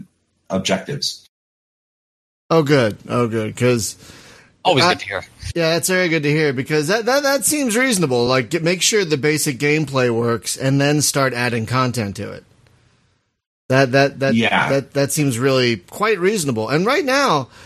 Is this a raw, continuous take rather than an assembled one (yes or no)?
yes